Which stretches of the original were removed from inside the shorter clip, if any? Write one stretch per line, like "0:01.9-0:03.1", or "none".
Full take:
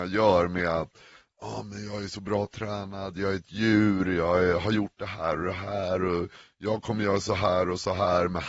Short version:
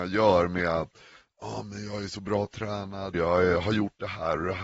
0:03.1-0:04.1